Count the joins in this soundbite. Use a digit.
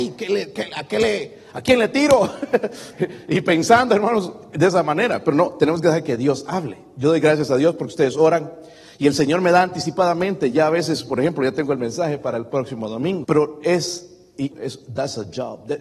2